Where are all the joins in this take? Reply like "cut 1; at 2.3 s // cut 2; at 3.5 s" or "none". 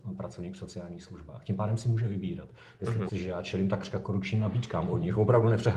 cut 1; at 3.1 s

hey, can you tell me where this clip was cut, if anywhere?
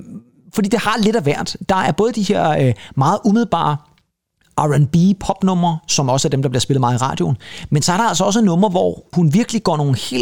none

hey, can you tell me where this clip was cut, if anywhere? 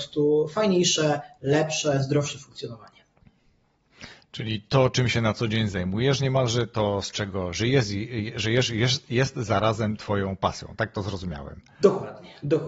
none

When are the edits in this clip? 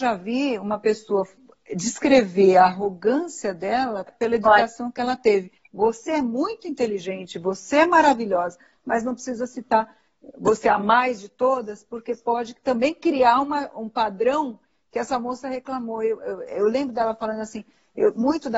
cut 1; at 4.1 s // cut 2; at 5.6 s

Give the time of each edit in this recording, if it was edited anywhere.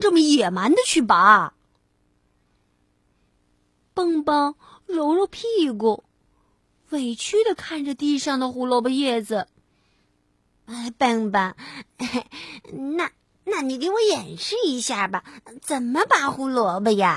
none

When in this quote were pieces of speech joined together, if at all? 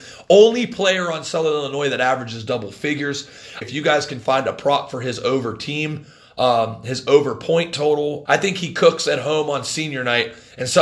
cut 1; at 3.6 s // cut 2; at 8.3 s

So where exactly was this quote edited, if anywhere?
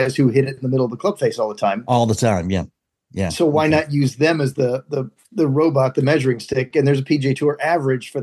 none

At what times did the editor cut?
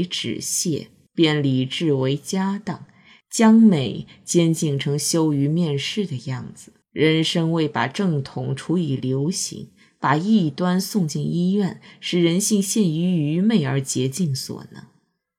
cut 1; at 6.8 s

